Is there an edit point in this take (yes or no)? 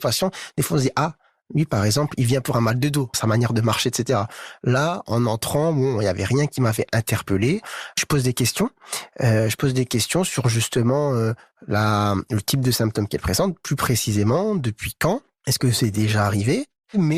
yes